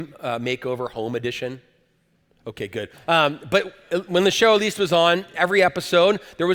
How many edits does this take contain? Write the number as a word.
one